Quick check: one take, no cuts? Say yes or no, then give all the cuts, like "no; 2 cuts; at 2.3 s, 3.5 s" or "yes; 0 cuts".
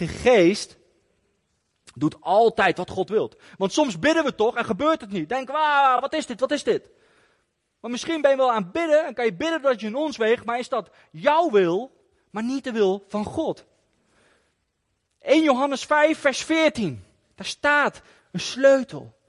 yes; 0 cuts